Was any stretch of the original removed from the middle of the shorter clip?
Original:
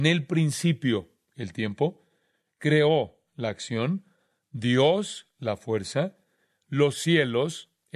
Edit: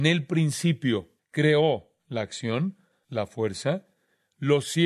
yes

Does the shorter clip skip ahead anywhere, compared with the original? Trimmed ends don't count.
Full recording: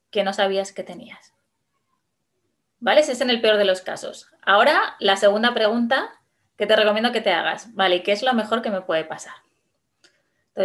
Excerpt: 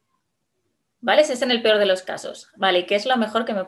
yes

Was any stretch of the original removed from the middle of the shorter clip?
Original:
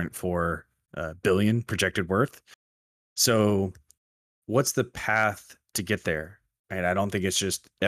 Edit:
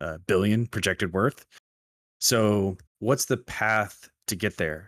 yes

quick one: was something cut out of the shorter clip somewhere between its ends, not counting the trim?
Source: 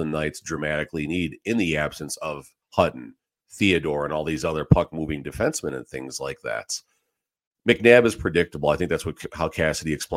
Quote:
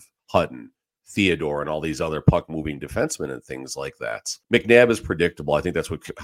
yes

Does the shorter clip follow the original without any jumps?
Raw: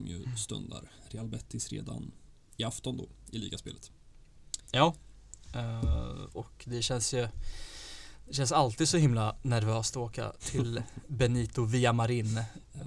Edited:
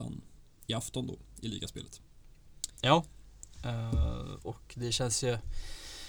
yes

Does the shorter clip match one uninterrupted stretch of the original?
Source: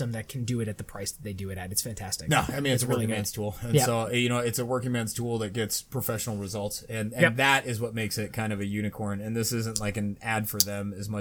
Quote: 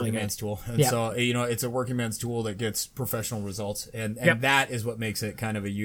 yes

